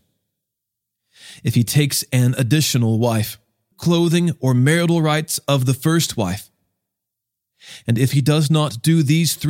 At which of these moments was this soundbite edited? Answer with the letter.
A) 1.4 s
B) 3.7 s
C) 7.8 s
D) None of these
B